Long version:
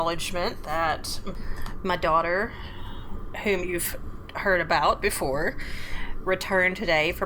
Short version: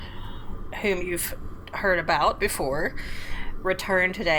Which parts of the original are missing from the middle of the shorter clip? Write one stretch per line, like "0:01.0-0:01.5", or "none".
none